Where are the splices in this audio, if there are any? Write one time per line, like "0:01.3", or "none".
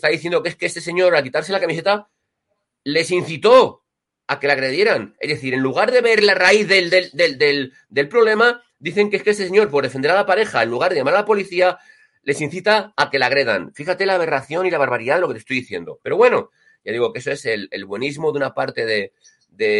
none